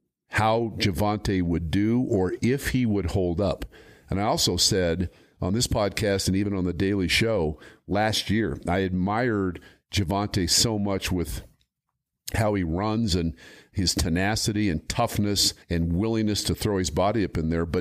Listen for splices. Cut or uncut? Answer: cut